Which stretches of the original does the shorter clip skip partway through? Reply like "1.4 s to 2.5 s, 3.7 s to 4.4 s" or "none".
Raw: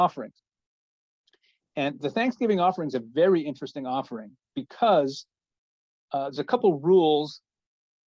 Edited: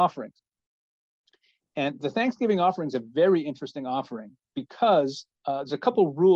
5.4 s to 6.0 s